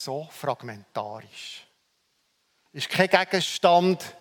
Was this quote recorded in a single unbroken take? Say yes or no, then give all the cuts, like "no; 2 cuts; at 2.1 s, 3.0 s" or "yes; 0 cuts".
no; 1 cut; at 2.7 s